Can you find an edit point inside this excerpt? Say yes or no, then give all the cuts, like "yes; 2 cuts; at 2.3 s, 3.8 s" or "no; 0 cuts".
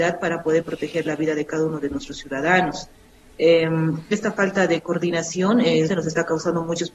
yes; 1 cut; at 5.9 s